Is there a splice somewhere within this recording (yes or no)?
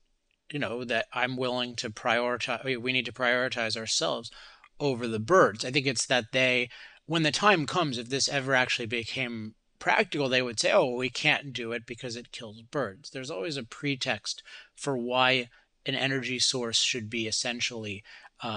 no